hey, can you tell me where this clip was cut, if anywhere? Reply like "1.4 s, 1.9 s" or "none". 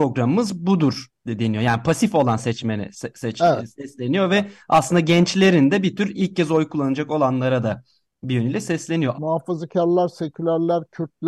9.1 s